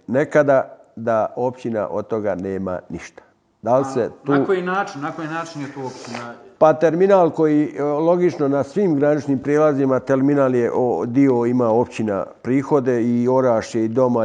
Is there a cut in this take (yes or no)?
no